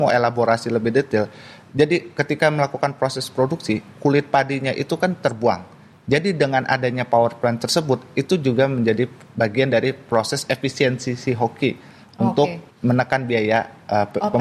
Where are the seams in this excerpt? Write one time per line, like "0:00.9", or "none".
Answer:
0:05.9
0:12.7

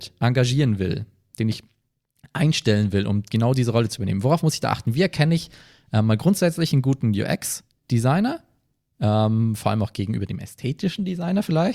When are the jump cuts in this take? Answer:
none

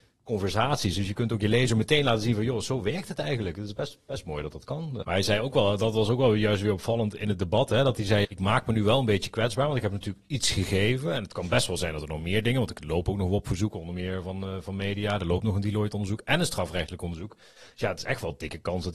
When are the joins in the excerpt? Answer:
0:05.0
0:08.2

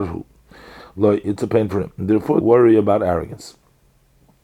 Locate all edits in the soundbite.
0:02.4

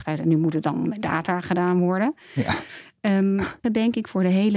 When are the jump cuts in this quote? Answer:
0:03.6

